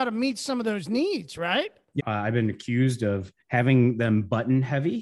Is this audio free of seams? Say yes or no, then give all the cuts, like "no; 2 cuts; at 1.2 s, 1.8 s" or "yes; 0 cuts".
no; 2 cuts; at 2.0 s, 3.4 s